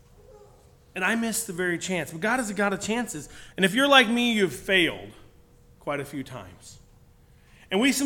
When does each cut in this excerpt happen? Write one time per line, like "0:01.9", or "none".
0:03.5